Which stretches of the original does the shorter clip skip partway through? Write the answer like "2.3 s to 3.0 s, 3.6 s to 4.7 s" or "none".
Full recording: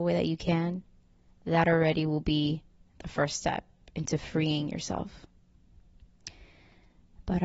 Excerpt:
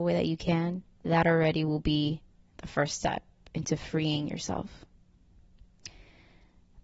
0.9 s to 1.3 s